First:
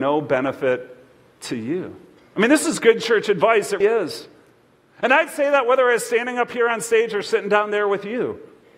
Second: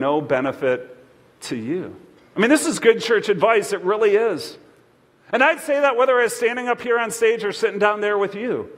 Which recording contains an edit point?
first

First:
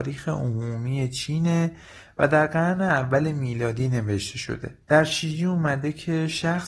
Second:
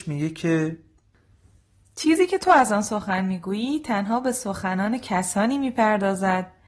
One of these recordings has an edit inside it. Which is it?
first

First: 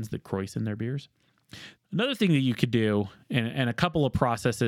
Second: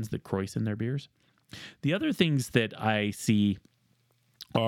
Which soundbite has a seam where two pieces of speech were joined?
first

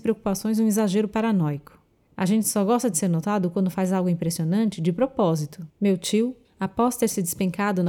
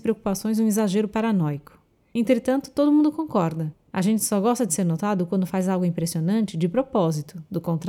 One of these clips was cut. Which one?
first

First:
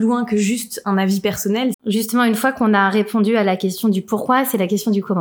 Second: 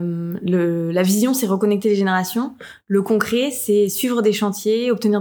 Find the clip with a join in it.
first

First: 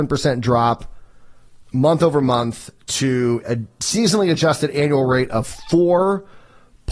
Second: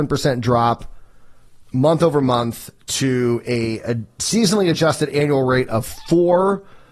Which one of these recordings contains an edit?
first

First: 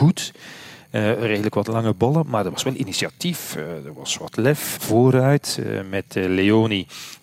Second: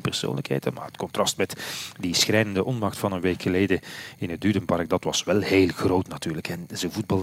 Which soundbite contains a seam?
first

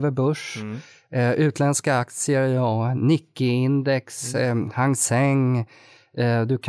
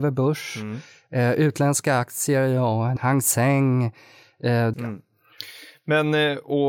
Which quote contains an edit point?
second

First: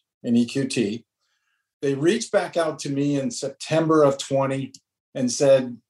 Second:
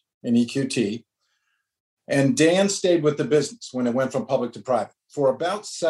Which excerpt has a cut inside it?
first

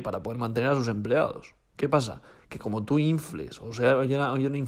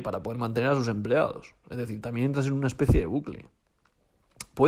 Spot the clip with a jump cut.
second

